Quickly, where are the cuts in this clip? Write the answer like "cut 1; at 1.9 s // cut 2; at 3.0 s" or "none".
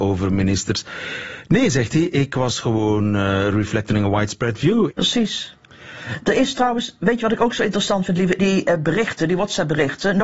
cut 1; at 4.9 s // cut 2; at 8.4 s